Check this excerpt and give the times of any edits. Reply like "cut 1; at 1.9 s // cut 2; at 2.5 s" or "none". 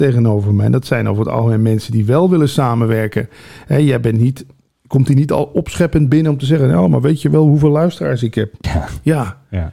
cut 1; at 8.6 s